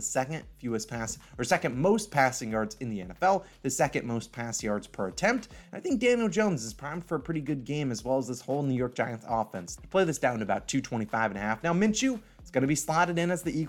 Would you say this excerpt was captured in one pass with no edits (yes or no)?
no